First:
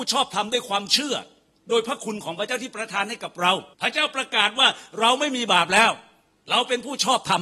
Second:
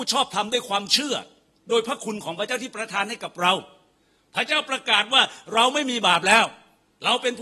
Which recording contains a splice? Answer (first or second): first